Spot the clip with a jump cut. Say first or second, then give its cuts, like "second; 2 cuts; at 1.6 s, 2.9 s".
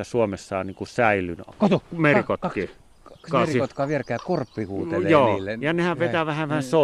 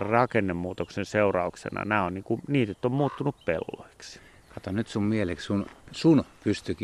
first; 2 cuts; at 1.5 s, 3.2 s